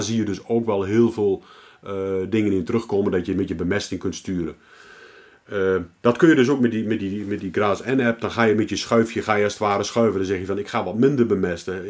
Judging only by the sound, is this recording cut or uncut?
uncut